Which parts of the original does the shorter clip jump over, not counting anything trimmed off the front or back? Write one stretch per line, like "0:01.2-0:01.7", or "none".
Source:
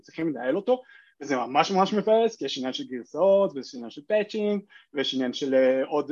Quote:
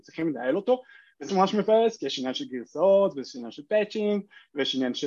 0:01.3-0:01.7

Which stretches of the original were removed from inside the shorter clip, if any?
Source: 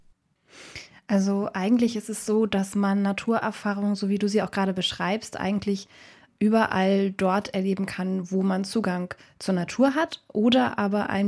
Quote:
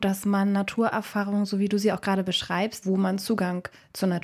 0:05.3-0:08.3

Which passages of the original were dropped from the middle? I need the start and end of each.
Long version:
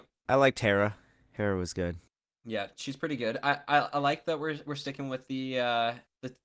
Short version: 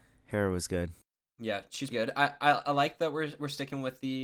0:03.0-0:03.2

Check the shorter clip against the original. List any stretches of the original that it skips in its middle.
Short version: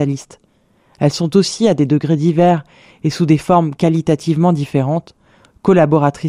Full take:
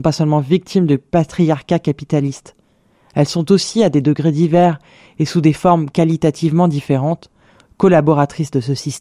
none

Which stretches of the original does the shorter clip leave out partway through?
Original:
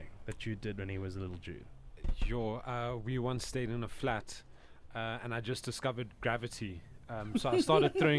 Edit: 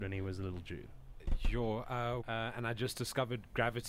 0:03.0-0:04.9

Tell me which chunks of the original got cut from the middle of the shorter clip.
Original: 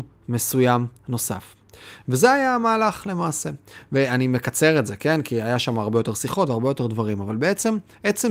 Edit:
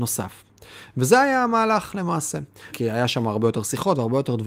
0:03.8-0:05.2

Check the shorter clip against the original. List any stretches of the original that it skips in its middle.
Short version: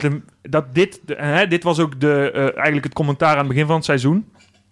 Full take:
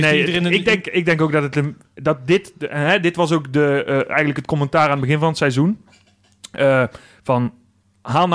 none

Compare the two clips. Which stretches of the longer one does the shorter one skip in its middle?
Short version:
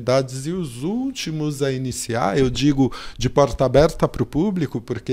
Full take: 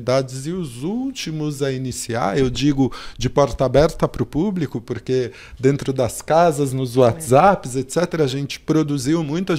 none

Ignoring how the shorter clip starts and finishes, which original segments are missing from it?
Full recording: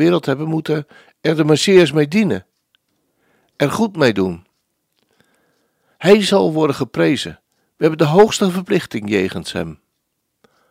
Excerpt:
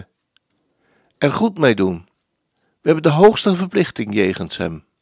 0:04.9-0:07.4

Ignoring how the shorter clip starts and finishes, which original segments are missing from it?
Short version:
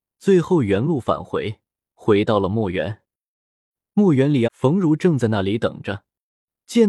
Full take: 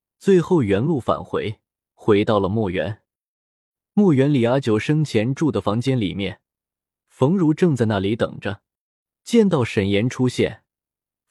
0:04.5-0:07.0

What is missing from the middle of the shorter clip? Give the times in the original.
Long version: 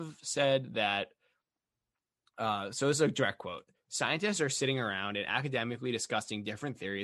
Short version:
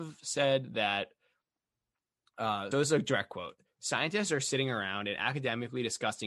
0:02.7-0:02.8

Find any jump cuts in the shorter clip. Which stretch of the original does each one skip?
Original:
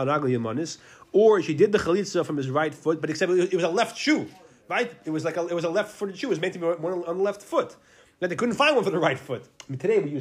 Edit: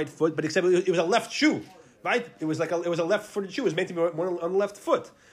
none

